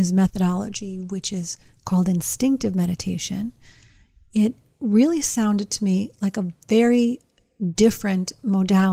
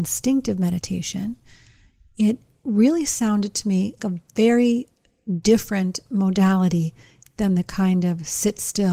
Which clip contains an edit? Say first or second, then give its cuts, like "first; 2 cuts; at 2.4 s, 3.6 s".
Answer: second; 1 cut; at 4.0 s